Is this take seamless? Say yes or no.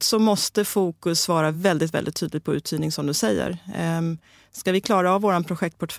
yes